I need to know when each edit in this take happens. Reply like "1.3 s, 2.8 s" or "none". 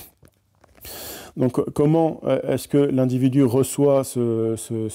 1.3 s